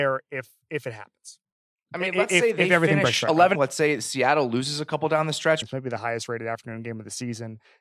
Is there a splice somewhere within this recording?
yes; 2 cuts; at 3.5 s, 5.6 s

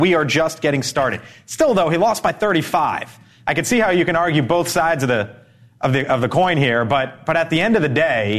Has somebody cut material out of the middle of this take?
no; 0 cuts

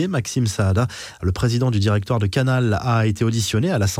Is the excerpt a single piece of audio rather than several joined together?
yes; 0 cuts

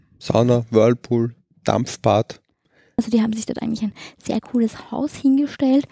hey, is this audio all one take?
no; 1 cut; at 3.0 s

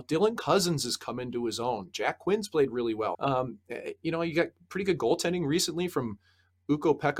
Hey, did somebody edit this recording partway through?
yes; 1 cut; at 3.1 s

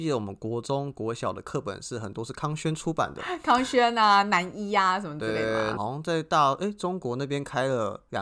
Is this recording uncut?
no; 1 cut; at 5.8 s

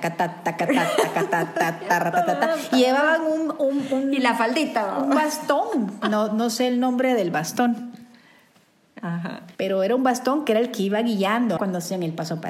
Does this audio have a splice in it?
yes; 2 cuts; at 9.5 s, 11.6 s

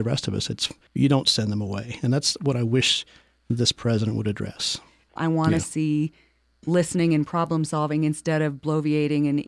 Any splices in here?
yes; 1 cut; at 5.2 s

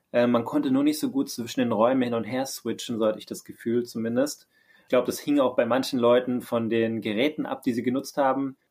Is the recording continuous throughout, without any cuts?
yes; 0 cuts

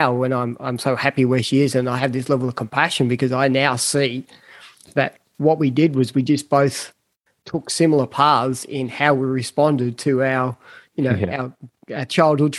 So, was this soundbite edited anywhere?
no; 0 cuts

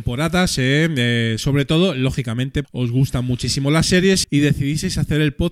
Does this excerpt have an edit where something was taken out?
yes; 2 cuts; at 2.6 s, 4.2 s

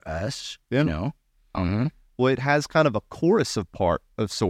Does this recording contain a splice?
yes; 1 cut; at 1.5 s

